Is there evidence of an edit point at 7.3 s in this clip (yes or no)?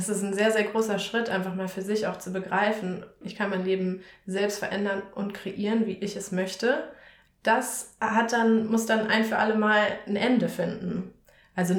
yes